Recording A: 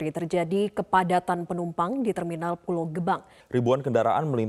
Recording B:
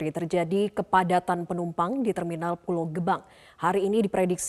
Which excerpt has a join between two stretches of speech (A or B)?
A